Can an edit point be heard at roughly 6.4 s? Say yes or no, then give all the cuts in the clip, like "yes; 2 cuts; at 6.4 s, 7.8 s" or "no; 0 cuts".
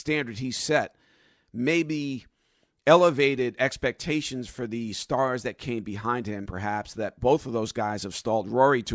yes; 1 cut; at 6.4 s